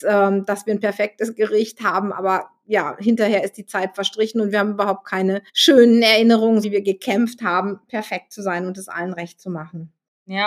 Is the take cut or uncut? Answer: cut